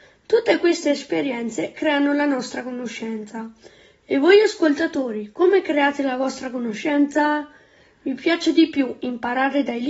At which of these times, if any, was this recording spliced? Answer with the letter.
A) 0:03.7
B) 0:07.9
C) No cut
C